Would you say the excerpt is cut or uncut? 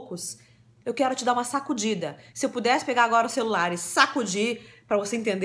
uncut